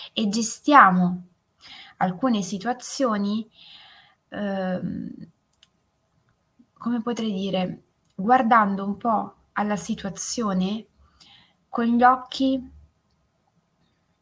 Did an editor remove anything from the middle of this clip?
no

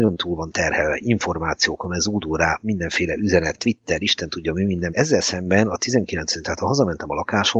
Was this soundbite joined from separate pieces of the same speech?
yes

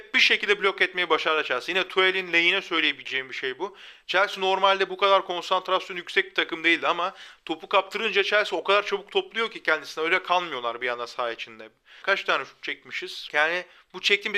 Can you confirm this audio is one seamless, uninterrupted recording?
no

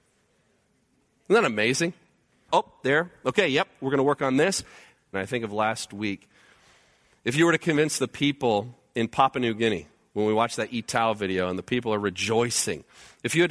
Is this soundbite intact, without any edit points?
no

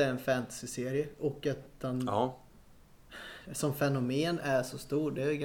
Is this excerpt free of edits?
yes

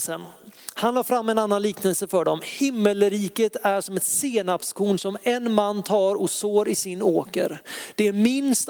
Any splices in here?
no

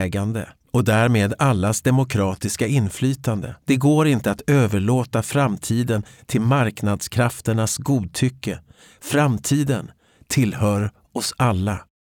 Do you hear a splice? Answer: yes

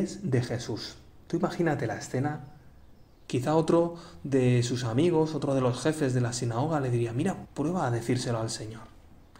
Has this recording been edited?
yes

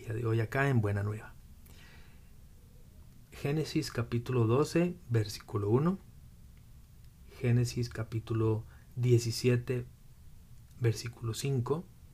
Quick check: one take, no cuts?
yes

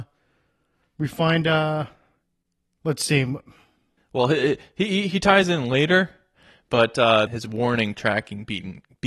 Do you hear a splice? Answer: yes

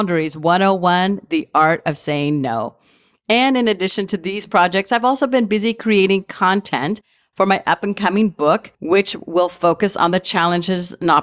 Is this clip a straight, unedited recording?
yes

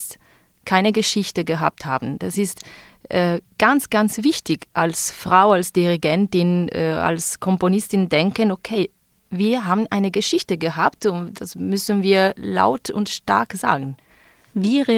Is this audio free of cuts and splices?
yes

